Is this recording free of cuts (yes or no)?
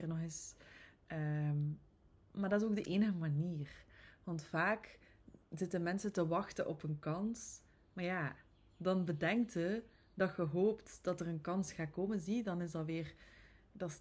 yes